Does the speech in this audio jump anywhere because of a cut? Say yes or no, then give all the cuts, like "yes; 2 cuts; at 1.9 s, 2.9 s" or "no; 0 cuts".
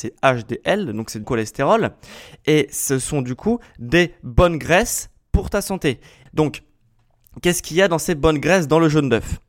yes; 2 cuts; at 1.2 s, 6.3 s